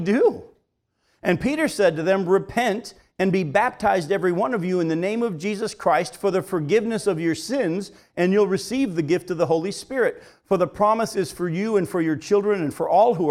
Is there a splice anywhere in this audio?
no; 0 cuts

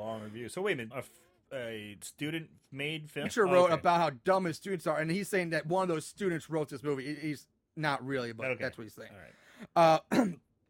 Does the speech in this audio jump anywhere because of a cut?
yes; 2 cuts; at 0.9 s, 3.3 s

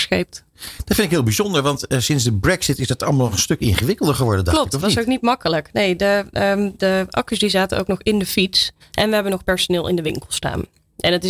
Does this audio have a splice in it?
yes; 2 cuts; at 6.8 s, 8.8 s

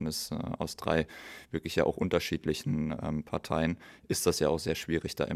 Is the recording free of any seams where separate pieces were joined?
yes; 0 cuts

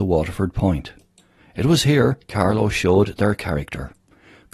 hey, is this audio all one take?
no; 1 cut; at 1.4 s

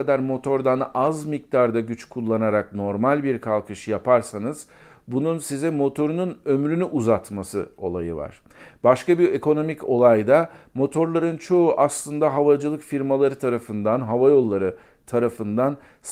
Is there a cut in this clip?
no; 0 cuts

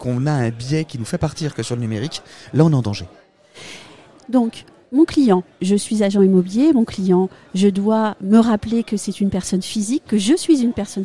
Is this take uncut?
yes; 0 cuts

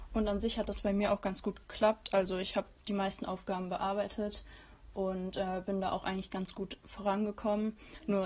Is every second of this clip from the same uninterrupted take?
yes; 0 cuts

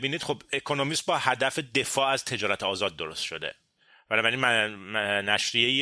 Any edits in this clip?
no; 0 cuts

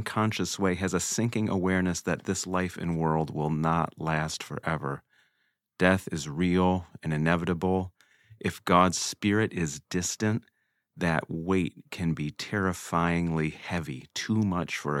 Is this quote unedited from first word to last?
yes; 0 cuts

